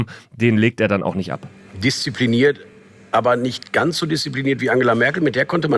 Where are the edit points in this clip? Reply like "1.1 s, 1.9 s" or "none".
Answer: none